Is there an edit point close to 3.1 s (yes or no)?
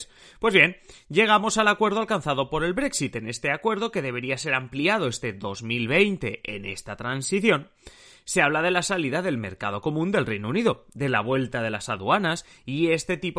no